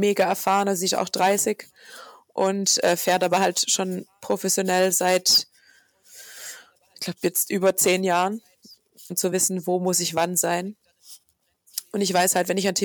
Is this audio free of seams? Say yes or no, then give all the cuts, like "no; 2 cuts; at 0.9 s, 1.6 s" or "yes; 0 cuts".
no; 1 cut; at 9.1 s